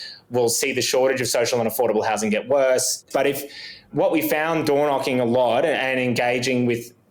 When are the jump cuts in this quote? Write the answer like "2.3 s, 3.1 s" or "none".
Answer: 3.1 s